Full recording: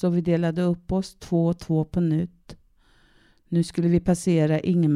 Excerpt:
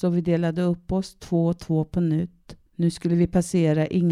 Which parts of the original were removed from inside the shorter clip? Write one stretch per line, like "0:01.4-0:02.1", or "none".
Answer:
0:02.7-0:03.4